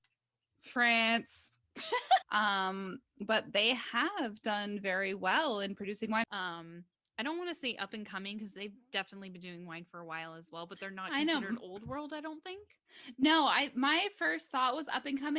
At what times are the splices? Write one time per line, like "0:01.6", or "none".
0:02.2
0:06.2